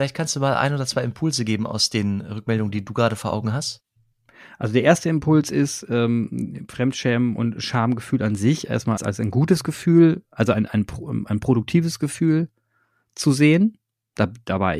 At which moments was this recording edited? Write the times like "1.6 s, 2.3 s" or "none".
9.0 s